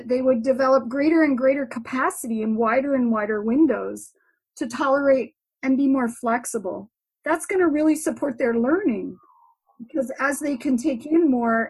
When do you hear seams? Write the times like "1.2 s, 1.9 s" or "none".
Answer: none